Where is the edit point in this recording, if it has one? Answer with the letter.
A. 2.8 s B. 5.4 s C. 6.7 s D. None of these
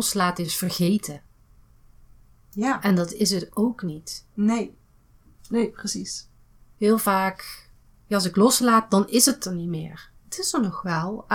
B